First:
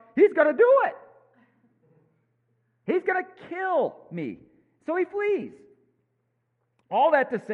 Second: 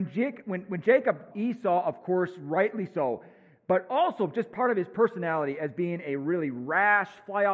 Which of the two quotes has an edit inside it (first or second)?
second